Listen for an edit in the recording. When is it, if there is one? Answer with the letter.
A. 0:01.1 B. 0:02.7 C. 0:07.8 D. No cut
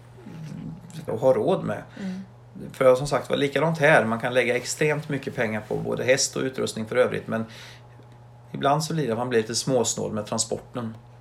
A